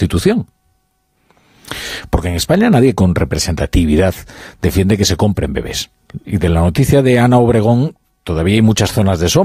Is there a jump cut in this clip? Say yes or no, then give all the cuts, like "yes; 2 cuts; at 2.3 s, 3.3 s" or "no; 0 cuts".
yes; 1 cut; at 6.2 s